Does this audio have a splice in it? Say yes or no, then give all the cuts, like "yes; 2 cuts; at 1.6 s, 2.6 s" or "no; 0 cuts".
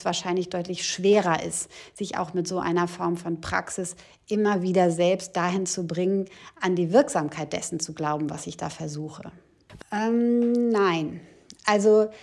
yes; 1 cut; at 9.8 s